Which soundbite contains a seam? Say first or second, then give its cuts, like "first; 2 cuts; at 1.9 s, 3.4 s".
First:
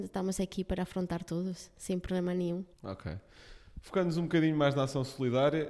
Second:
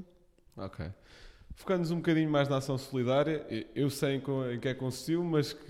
first; 1 cut; at 2.7 s